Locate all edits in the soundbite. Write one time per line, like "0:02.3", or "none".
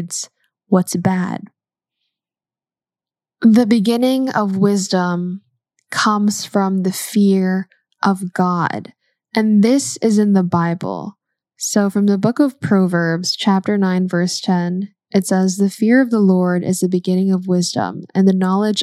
none